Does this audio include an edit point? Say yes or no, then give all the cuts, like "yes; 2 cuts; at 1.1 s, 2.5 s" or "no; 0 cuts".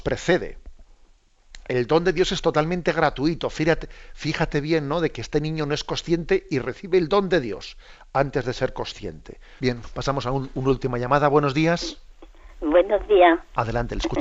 yes; 1 cut; at 9.6 s